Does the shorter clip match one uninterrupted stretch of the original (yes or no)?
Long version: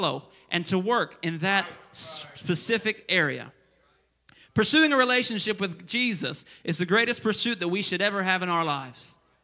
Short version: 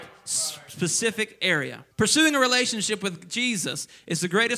no